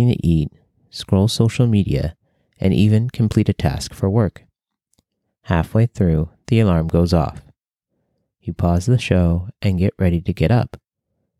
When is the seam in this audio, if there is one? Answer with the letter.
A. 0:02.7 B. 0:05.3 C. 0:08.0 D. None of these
B